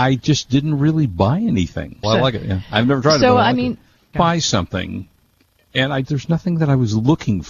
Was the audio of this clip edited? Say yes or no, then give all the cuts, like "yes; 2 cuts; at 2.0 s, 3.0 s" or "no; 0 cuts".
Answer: yes; 3 cuts; at 2.0 s, 4.1 s, 6.0 s